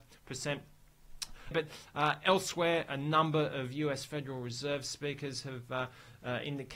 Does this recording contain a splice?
yes; 1 cut; at 1.5 s

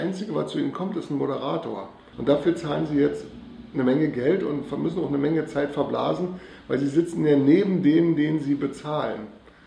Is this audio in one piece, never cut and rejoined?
no; 1 cut; at 2.1 s

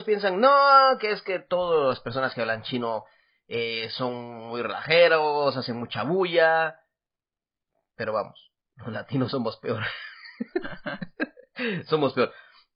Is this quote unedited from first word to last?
yes; 0 cuts

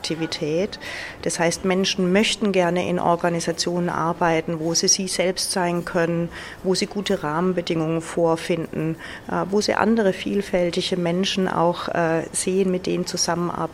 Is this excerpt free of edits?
yes; 0 cuts

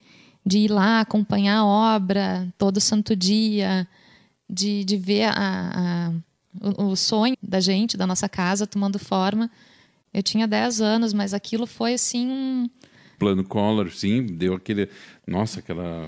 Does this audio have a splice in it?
yes; 2 cuts; at 7.3 s, 13.2 s

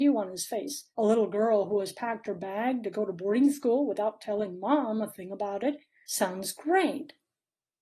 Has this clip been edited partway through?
yes; 2 cuts; at 0.9 s, 6.0 s

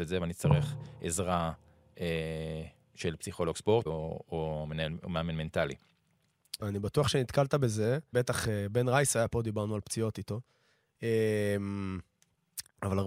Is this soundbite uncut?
no; 3 cuts; at 3.9 s, 6.6 s, 8.1 s

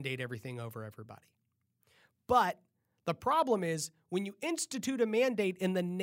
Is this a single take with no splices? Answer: yes; 0 cuts

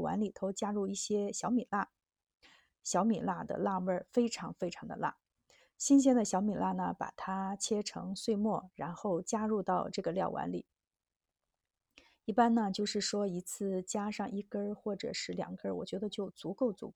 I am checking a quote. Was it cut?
no; 0 cuts

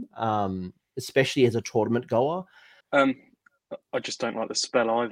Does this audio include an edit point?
yes; 1 cut; at 2.8 s

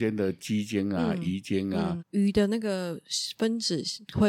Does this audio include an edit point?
yes; 1 cut; at 2.0 s

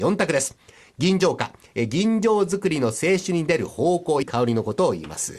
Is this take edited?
yes; 1 cut; at 4.2 s

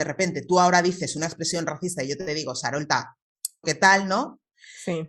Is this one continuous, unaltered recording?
no; 1 cut; at 3.6 s

